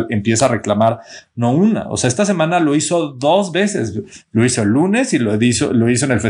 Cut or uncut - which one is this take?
uncut